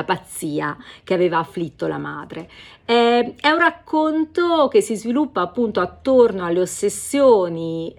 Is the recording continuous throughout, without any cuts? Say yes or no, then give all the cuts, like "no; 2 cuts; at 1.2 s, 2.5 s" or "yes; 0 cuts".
yes; 0 cuts